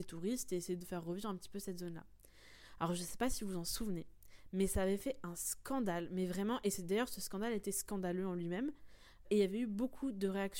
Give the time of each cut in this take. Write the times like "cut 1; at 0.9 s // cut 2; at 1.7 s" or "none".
cut 1; at 9.2 s